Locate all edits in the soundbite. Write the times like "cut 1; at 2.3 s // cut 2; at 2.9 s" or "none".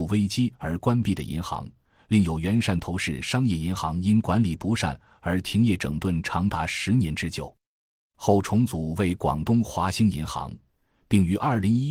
none